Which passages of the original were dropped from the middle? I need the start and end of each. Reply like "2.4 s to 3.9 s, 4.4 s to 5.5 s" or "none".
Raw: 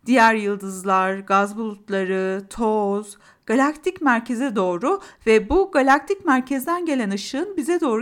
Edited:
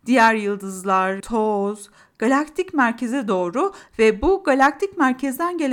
1.2 s to 2.5 s